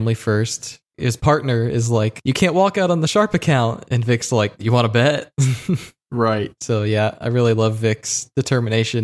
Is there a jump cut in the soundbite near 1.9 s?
no; 0 cuts

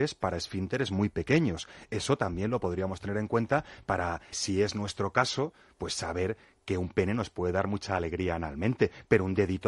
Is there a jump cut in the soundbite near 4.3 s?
yes; 1 cut; at 4.3 s

